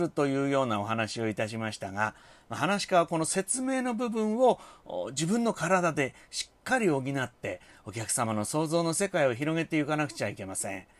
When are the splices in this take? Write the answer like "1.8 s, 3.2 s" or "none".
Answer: none